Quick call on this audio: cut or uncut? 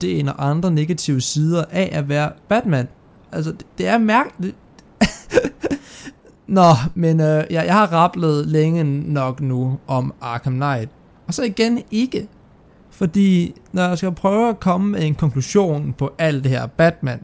cut